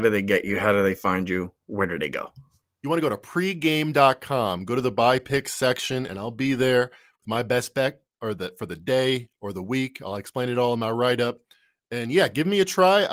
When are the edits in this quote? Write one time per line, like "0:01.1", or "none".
none